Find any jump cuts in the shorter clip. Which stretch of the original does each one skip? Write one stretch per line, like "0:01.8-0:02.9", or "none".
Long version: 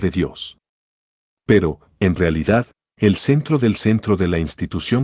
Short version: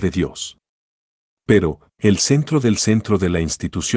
0:01.9-0:02.9